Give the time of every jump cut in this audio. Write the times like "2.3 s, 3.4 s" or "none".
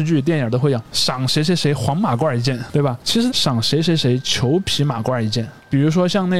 3.3 s